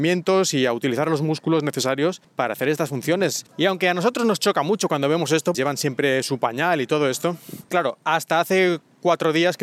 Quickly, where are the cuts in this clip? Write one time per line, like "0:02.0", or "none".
0:03.5
0:05.5
0:07.7